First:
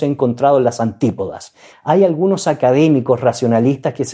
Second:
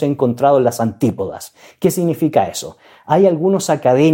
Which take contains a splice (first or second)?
first